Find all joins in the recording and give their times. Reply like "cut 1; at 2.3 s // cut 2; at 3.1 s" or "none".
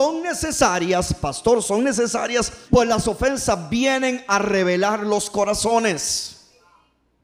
cut 1; at 2.7 s